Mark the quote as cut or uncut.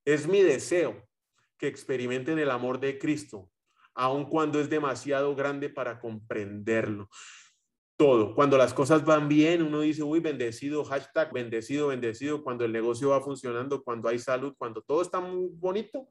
cut